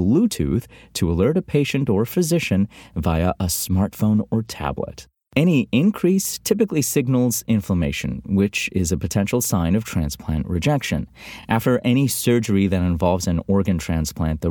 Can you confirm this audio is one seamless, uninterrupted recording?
yes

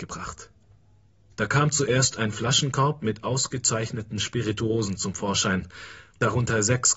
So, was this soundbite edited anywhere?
yes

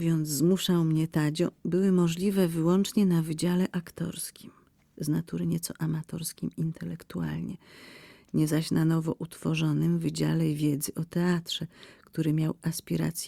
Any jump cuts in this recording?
no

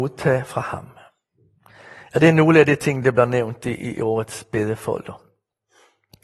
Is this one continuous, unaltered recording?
yes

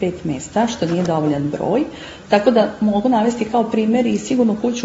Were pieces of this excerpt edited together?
no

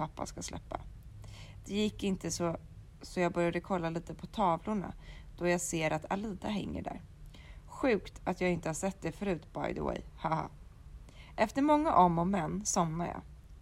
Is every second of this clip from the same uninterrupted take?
yes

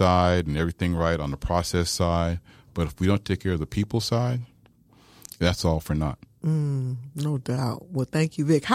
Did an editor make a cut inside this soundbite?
no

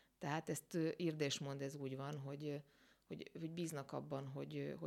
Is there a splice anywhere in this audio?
no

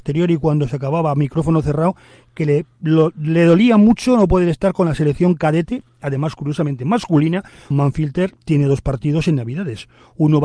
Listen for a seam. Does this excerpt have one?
yes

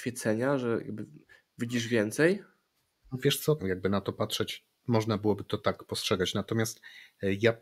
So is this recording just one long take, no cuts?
no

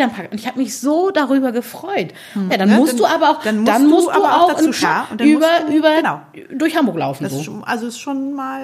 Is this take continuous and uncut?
no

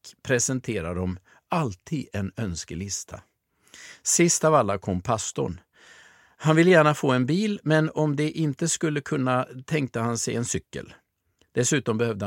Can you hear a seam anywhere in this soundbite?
no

